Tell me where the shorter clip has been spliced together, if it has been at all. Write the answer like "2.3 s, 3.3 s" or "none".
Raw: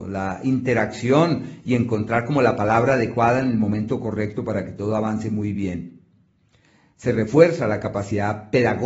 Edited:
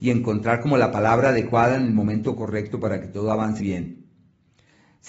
3.6 s